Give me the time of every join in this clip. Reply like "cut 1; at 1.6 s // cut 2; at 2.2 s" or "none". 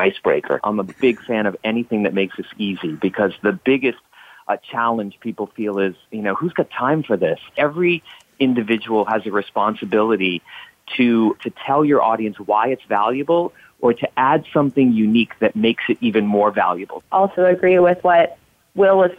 cut 1; at 11.4 s